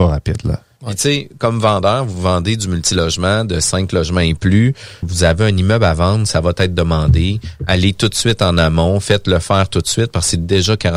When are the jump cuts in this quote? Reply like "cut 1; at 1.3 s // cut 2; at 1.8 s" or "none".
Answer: cut 1; at 5.0 s